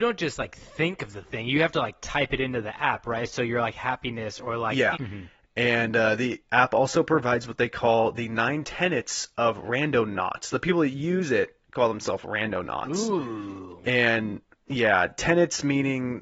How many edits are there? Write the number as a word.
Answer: one